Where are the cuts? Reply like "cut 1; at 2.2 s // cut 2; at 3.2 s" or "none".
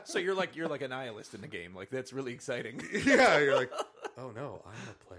none